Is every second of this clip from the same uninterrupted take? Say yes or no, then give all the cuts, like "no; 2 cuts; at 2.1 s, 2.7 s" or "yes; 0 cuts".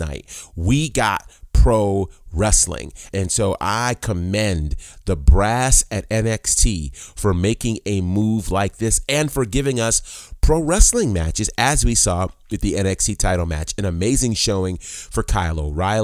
no; 1 cut; at 3.1 s